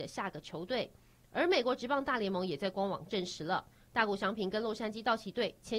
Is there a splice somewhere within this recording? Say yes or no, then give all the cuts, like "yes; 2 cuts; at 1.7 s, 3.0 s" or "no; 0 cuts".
no; 0 cuts